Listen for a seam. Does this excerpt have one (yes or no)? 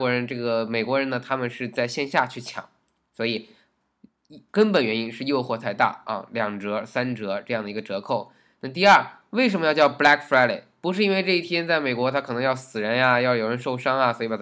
yes